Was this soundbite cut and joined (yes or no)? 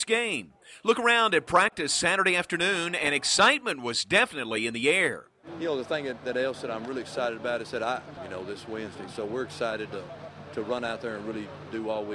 yes